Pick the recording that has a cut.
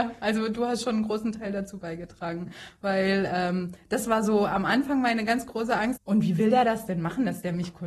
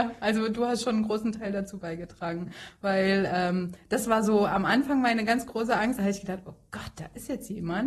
first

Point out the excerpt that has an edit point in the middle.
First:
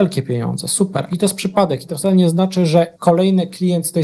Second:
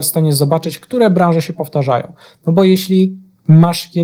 first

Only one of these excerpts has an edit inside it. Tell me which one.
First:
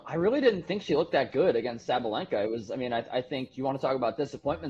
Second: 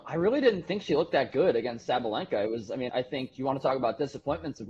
second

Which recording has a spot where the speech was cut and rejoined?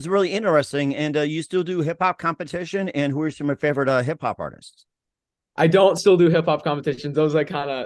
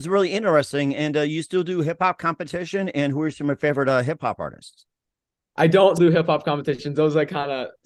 second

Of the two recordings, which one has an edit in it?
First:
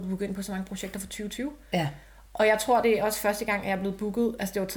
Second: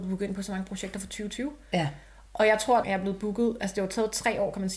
second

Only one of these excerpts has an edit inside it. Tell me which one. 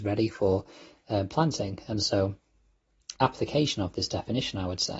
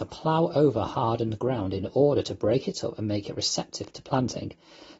first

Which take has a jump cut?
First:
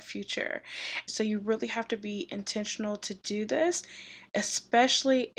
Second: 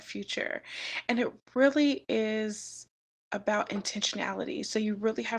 first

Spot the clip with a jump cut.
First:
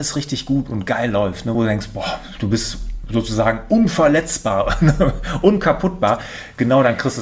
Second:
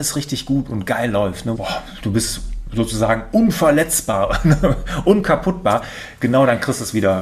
second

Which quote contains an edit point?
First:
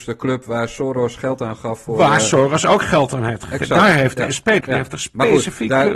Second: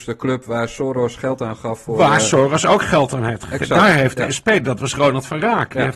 first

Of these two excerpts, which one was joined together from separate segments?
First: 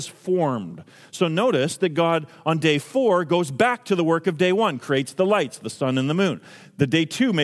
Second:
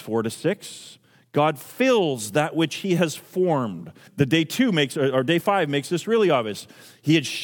second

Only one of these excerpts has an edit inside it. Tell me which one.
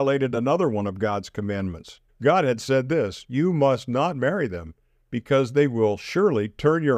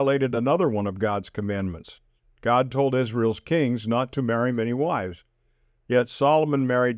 first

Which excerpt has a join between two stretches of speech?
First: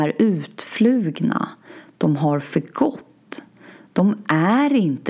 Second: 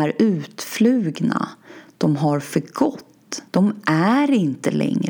second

